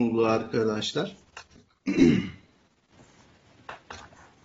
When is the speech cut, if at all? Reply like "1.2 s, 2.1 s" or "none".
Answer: 1.6 s